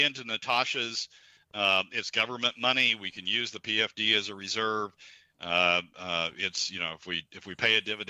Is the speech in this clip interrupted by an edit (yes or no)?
no